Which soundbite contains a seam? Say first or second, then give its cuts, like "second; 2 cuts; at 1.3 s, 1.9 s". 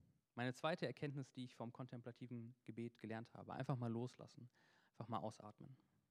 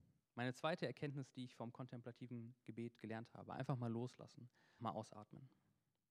second; 1 cut; at 4.8 s